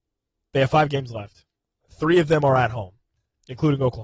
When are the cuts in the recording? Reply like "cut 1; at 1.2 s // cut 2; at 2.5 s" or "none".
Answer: none